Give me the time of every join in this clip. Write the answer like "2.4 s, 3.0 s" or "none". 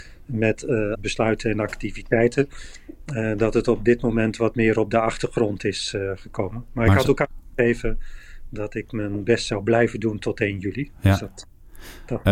0.9 s